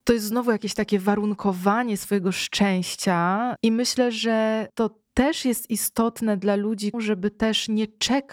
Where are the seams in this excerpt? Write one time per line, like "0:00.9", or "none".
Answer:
0:03.6
0:06.9